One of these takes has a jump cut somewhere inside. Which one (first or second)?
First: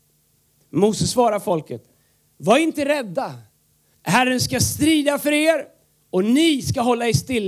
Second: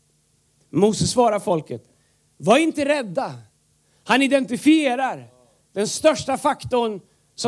first